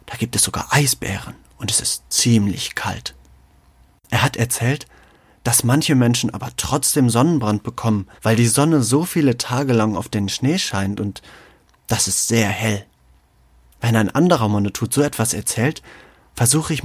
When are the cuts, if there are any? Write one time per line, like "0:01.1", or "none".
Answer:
0:08.2
0:13.7